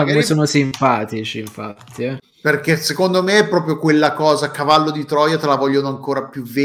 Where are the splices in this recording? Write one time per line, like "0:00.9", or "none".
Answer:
0:02.2

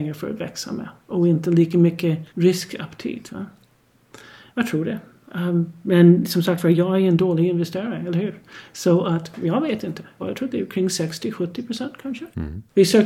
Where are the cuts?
0:02.3
0:10.2

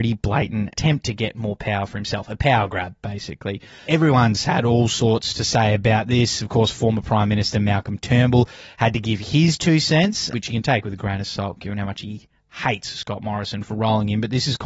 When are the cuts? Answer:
none

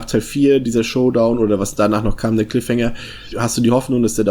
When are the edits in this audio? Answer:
0:03.3

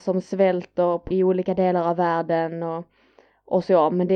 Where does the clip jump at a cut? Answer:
0:01.1

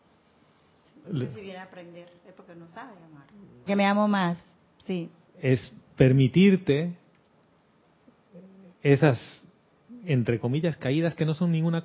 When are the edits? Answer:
0:01.0
0:03.7
0:05.2

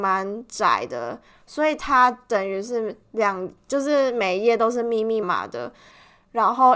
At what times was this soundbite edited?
0:05.2

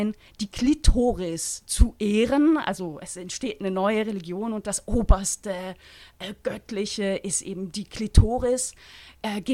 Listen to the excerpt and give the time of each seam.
none

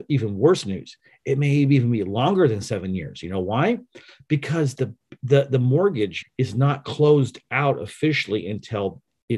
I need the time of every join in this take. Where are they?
0:06.2

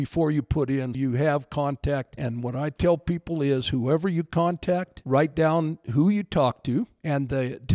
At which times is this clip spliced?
0:00.9

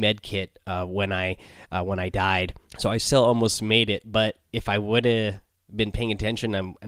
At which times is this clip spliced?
0:02.7

